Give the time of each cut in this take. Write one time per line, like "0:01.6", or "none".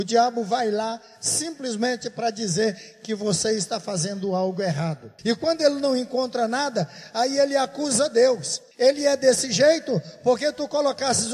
0:05.2
0:08.7